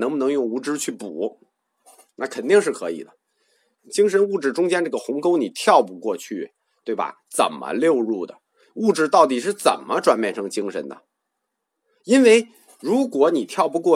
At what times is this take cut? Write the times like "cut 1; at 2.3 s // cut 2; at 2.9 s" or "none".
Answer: cut 1; at 3.8 s

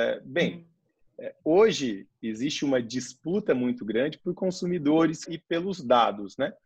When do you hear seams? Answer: cut 1; at 5.3 s

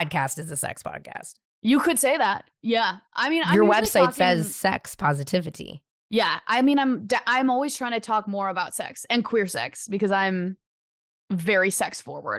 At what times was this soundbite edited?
none

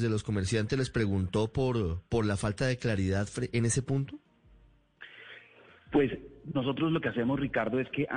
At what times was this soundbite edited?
none

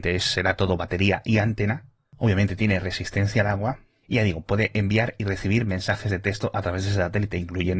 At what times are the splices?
none

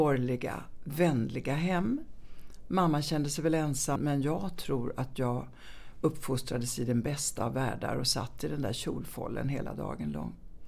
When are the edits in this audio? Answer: cut 1; at 4.0 s

